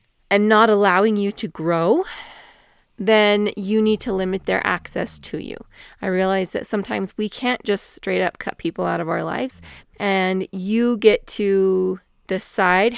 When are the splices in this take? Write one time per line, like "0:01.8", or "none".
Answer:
0:09.8